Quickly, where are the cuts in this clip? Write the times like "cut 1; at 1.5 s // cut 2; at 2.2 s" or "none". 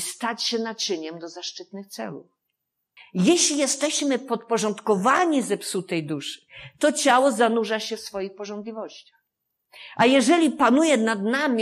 cut 1; at 3.0 s